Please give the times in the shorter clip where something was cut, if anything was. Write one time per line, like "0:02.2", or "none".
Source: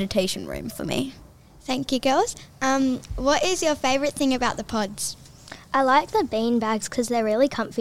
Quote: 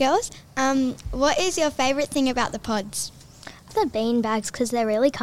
0:03.7